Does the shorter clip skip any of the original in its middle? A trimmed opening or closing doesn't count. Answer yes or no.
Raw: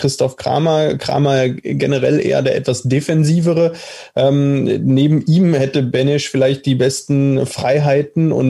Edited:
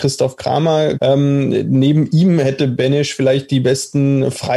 yes